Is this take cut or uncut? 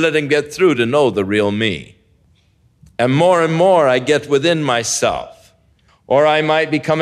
cut